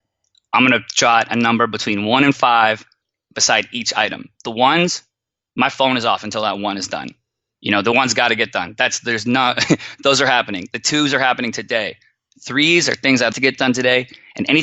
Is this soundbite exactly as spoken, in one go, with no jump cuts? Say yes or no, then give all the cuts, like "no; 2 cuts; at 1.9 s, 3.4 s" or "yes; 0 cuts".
no; 2 cuts; at 4.4 s, 13.3 s